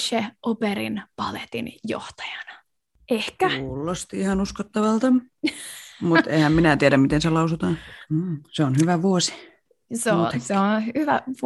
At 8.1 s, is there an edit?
yes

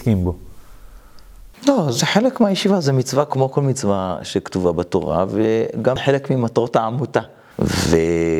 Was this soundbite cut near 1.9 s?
no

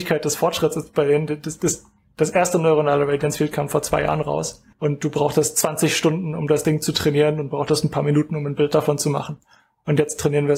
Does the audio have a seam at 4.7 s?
yes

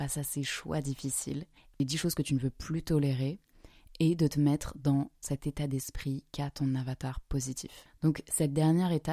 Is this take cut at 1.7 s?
yes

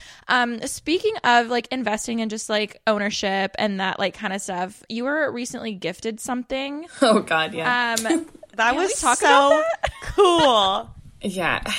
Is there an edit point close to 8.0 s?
no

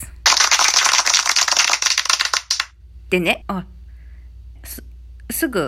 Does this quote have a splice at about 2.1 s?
no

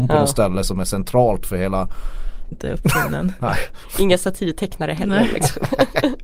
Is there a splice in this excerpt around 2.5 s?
yes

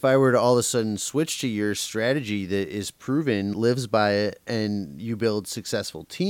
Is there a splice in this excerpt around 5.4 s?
no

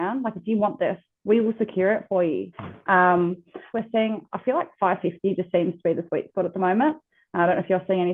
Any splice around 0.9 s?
no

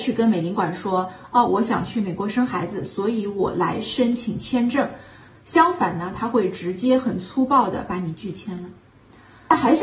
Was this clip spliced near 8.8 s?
no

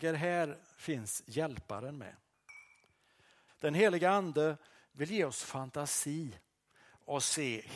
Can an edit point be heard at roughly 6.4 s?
no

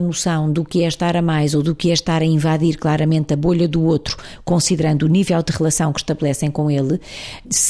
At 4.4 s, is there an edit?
no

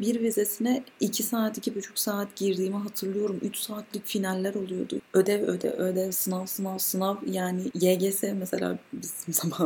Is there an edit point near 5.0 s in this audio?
yes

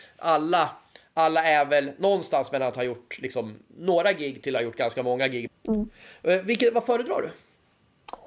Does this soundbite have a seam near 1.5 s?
no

